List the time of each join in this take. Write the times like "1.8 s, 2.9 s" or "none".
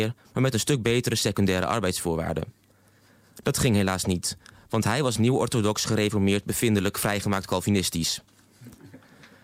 none